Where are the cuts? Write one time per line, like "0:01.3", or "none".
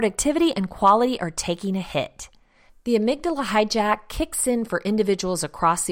0:02.7